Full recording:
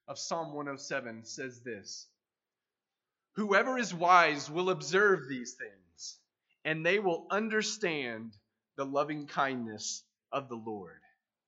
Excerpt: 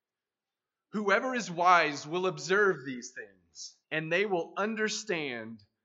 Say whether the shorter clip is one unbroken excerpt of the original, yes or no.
no